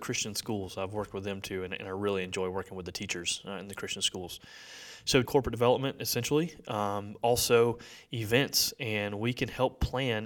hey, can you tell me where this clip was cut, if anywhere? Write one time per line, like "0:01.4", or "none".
0:05.3